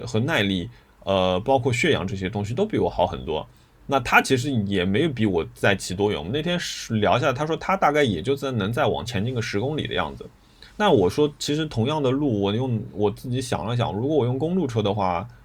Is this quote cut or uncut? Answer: cut